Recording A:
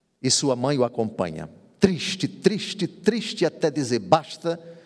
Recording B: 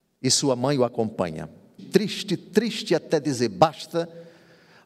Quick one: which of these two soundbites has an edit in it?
B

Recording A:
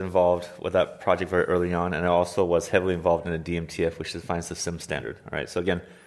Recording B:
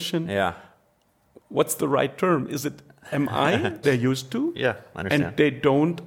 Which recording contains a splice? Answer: B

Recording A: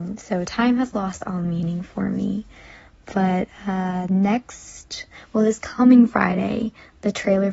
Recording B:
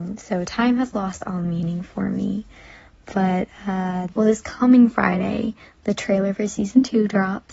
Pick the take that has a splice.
B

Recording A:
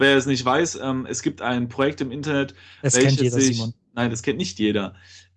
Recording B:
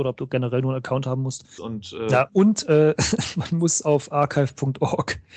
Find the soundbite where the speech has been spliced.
B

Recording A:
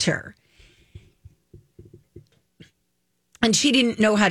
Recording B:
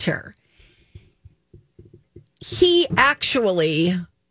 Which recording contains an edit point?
A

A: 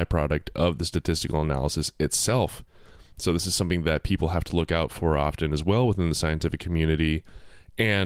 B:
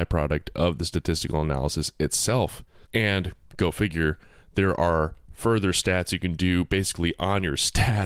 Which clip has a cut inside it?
B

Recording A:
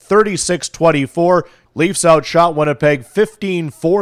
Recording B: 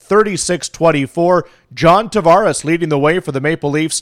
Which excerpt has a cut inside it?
A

